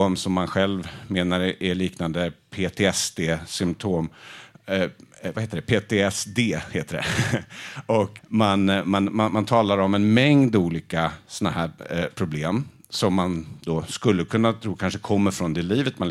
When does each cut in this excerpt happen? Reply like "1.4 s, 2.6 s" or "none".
8.2 s